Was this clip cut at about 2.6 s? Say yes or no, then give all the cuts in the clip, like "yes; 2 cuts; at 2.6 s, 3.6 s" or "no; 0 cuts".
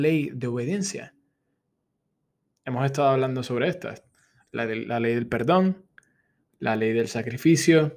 yes; 1 cut; at 2.6 s